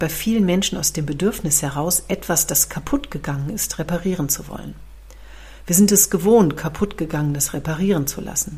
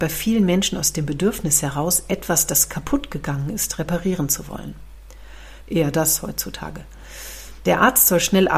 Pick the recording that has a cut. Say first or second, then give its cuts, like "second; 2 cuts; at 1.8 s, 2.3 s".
second; 2 cuts; at 5.6 s, 7.6 s